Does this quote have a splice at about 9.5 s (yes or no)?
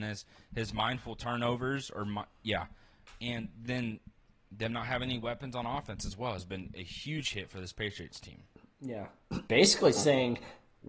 yes